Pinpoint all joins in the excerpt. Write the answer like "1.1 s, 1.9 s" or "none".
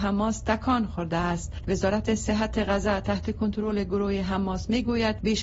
1.6 s